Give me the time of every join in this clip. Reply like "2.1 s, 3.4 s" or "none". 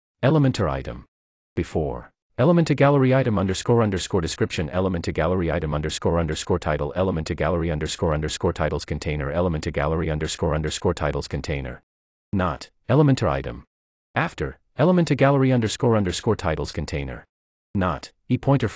2.3 s, 12.8 s